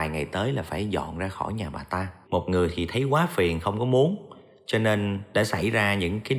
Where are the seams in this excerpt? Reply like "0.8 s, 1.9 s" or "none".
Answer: 2.2 s